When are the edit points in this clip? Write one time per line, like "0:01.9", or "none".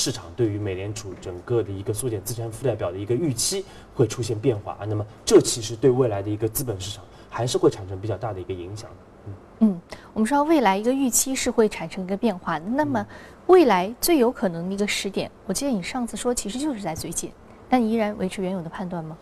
none